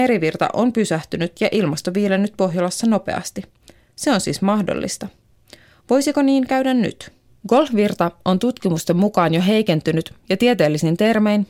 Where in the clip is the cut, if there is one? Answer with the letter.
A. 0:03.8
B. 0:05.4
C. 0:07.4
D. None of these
C